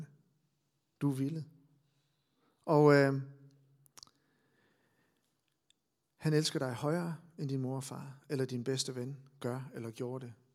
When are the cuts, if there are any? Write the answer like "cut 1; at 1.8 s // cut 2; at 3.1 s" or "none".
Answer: none